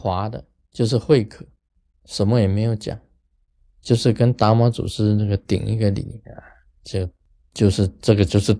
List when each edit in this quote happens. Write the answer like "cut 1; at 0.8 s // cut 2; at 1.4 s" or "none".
none

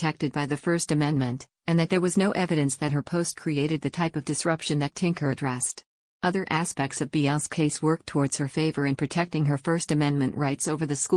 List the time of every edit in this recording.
none

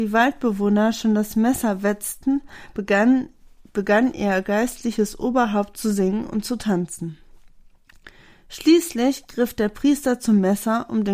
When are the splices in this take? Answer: none

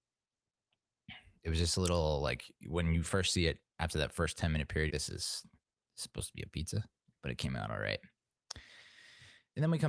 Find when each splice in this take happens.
cut 1; at 4.9 s // cut 2; at 7.1 s

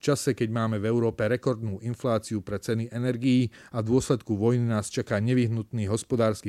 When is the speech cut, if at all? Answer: none

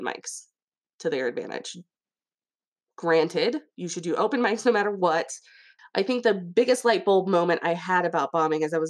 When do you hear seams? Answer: cut 1; at 5.8 s

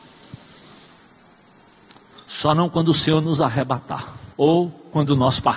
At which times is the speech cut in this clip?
cut 1; at 4.3 s

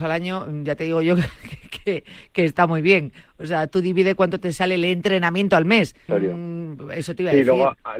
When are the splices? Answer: cut 1; at 6.1 s

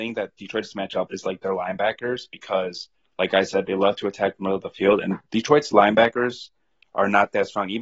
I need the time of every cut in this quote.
cut 1; at 1.1 s

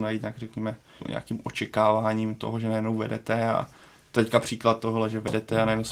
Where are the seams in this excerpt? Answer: cut 1; at 1.0 s

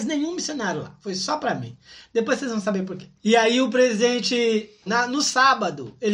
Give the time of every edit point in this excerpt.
cut 1; at 3.2 s // cut 2; at 4.9 s

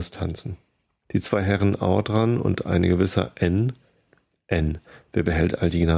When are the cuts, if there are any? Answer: cut 1; at 1.0 s

